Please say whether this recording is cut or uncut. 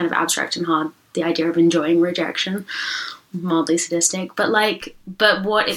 uncut